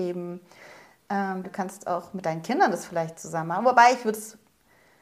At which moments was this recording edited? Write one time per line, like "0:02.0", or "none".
0:01.4